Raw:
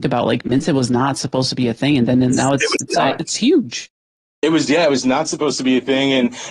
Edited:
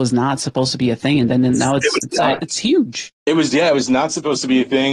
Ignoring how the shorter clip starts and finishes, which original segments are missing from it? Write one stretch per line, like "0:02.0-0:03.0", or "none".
0:03.9-0:04.3